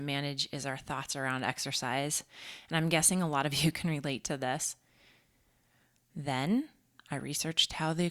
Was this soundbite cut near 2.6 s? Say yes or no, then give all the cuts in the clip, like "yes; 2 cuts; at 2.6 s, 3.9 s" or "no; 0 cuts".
no; 1 cut; at 6.0 s